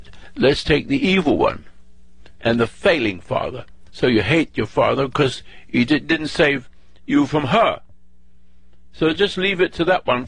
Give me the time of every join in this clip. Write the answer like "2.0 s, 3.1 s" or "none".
2.4 s